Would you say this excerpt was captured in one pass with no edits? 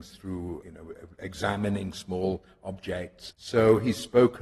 no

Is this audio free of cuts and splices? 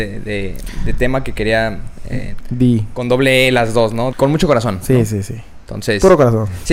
no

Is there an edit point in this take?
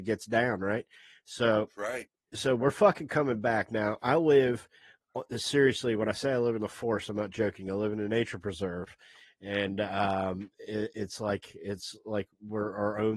no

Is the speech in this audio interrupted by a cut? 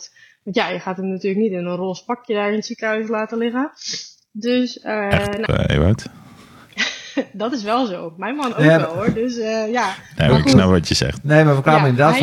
yes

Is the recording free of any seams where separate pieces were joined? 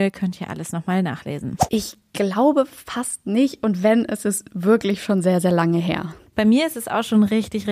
no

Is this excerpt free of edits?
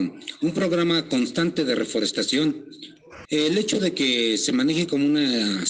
no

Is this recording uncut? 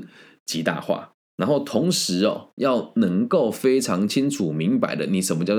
yes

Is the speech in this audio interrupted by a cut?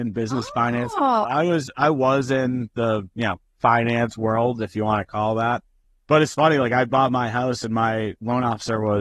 no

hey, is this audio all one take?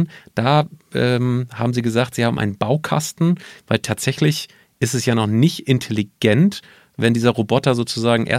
no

